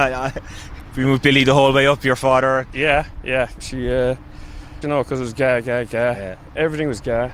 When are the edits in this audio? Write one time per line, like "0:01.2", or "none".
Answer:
0:03.6
0:04.8